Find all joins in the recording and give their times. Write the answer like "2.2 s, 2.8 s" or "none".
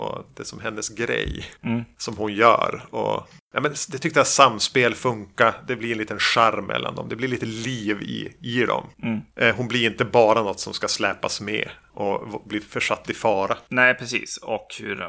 none